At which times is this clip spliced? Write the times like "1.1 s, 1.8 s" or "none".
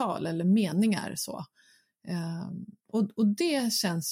2.8 s